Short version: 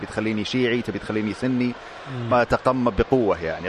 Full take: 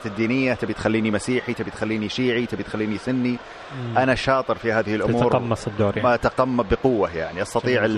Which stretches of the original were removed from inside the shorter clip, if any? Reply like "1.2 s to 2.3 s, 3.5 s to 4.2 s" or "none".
3.9 s to 6.0 s